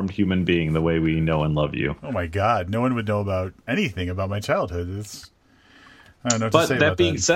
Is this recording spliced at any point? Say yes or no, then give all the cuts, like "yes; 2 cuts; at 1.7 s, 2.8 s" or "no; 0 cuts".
no; 0 cuts